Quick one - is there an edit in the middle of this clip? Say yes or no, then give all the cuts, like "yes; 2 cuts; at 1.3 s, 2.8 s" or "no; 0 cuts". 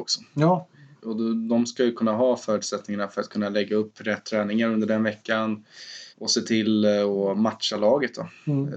yes; 2 cuts; at 1.0 s, 6.1 s